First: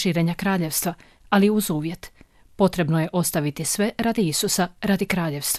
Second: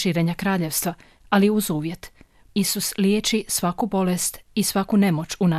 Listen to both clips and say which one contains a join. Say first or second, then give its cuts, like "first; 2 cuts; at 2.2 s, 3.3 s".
second; 1 cut; at 2.5 s